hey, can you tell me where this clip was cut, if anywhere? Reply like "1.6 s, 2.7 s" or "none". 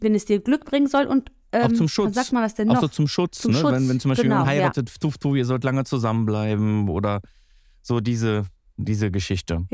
none